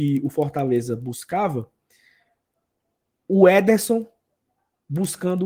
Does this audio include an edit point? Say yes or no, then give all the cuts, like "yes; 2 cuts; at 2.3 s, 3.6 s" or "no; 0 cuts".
no; 0 cuts